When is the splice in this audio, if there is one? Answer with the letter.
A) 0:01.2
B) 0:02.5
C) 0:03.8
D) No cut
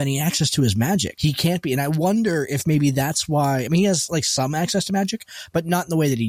A